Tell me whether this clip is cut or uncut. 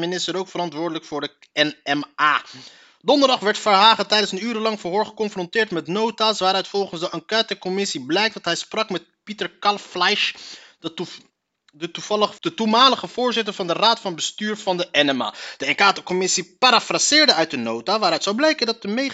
cut